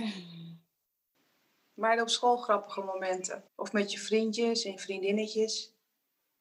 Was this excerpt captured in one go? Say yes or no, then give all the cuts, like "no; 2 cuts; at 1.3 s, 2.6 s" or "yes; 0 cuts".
no; 1 cut; at 3.5 s